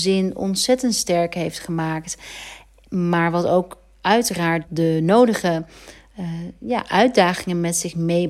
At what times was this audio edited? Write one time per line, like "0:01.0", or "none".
0:04.6